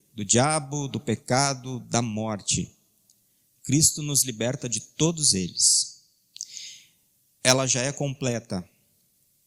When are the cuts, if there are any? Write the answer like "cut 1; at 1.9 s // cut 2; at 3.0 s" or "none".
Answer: cut 1; at 7.2 s